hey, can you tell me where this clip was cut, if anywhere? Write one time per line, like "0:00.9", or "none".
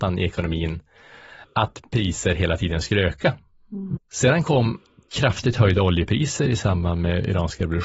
0:04.0